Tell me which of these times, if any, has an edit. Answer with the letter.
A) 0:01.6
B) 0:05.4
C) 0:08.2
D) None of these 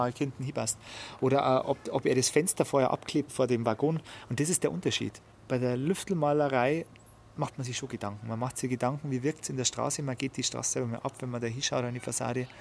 D